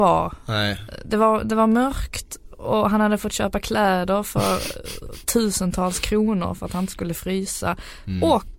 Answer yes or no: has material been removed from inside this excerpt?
no